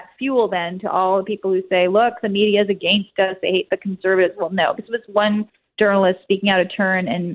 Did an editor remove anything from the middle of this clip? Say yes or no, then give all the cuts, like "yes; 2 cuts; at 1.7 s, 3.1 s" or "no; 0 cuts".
no; 0 cuts